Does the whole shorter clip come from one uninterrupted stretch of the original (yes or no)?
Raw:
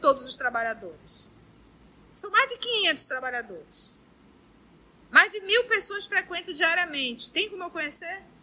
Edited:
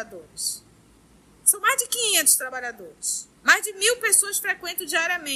no